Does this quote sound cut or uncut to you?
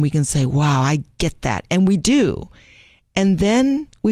uncut